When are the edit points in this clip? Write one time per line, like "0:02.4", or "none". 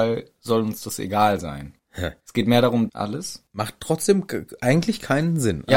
0:02.9